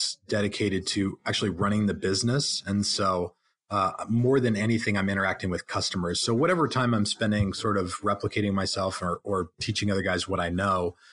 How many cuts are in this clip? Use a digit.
0